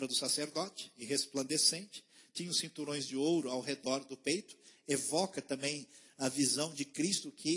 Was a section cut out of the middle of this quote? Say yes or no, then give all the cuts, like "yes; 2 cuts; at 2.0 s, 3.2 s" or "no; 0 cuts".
no; 0 cuts